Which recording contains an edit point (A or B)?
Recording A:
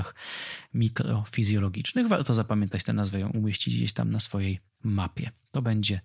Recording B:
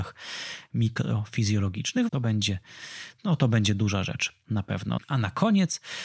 B